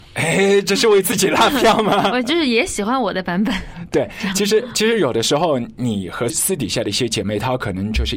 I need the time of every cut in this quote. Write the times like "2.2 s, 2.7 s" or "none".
none